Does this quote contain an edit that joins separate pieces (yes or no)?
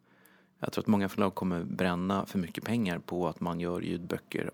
no